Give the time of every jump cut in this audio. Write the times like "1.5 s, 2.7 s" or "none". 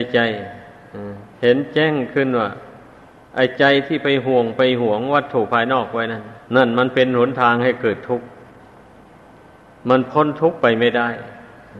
1.3 s, 6.5 s